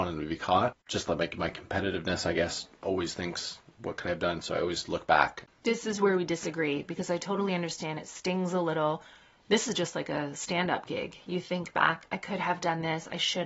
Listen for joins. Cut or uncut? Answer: uncut